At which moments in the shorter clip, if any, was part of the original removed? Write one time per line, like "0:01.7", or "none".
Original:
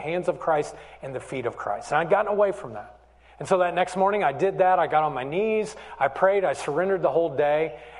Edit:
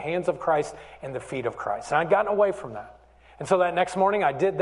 none